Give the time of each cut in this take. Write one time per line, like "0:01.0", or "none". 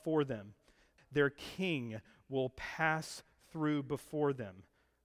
0:01.0